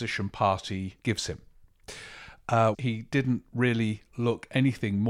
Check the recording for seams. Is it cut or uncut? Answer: cut